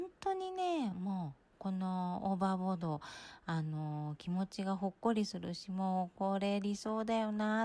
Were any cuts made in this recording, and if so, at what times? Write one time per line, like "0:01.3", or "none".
none